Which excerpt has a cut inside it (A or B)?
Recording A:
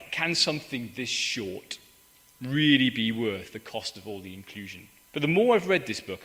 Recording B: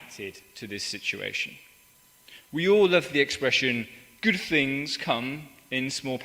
A